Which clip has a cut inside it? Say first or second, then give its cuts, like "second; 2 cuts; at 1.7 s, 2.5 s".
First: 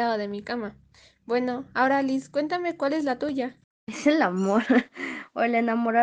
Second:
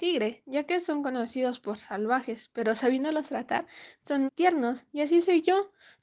second; 1 cut; at 4.3 s